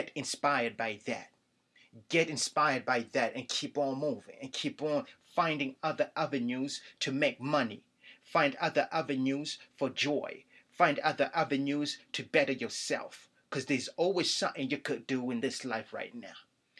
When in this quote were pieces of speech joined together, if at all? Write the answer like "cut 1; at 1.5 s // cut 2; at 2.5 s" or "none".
none